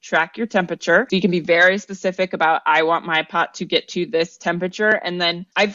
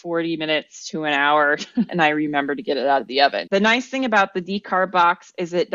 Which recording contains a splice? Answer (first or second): second